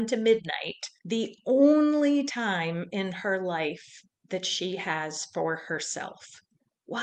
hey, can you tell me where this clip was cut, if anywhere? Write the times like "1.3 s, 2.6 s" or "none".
1.0 s